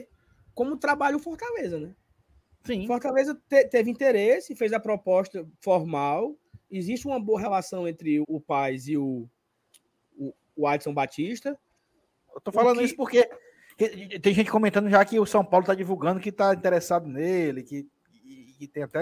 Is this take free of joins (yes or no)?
no